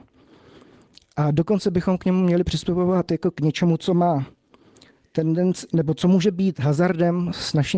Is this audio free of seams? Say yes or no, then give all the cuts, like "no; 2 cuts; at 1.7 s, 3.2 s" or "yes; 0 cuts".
yes; 0 cuts